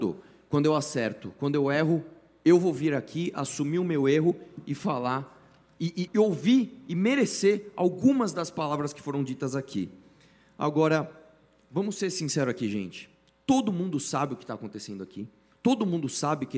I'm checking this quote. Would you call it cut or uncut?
cut